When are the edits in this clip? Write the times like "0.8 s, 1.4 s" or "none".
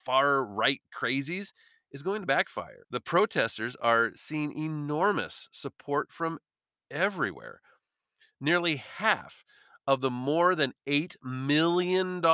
2.8 s